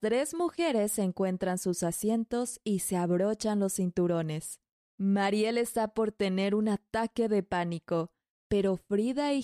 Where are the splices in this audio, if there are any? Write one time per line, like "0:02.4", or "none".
none